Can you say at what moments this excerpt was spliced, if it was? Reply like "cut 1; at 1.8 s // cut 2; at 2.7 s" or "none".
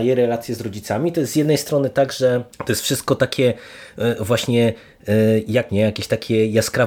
cut 1; at 2.5 s // cut 2; at 5.7 s